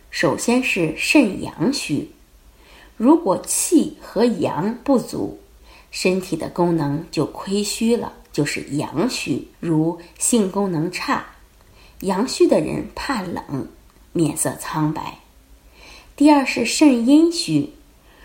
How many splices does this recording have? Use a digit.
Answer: 2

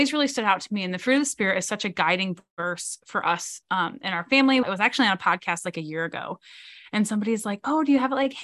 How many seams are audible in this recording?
1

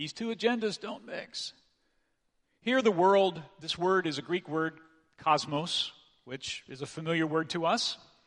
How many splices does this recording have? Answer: 0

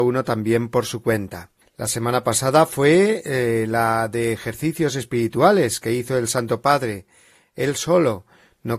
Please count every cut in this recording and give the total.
1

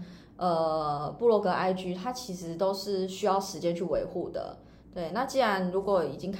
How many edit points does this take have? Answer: 0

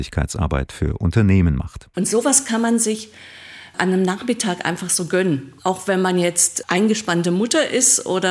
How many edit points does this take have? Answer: 2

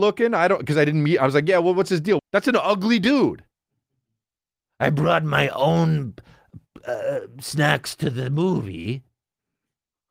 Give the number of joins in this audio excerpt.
1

